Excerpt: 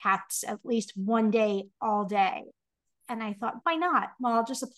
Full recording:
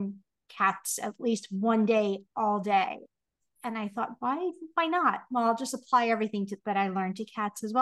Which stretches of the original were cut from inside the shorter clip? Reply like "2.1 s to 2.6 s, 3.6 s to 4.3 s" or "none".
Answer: 4.2 s to 4.7 s